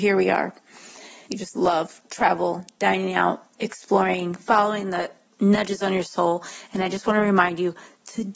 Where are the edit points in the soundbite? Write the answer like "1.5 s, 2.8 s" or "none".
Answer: 1.3 s